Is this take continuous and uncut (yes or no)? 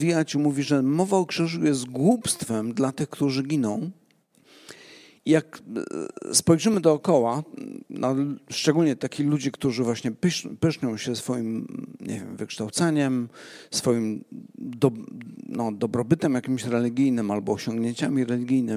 yes